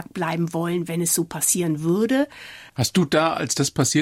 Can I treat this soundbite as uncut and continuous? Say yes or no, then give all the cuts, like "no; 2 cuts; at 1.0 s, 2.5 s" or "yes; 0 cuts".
no; 1 cut; at 2.7 s